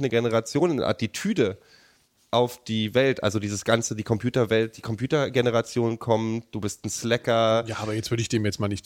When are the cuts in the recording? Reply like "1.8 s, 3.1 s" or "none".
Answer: none